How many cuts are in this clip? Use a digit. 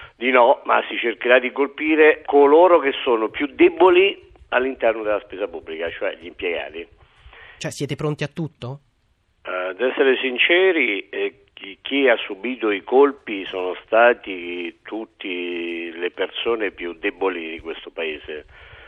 2